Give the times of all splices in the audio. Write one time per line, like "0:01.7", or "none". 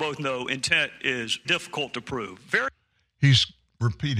0:01.4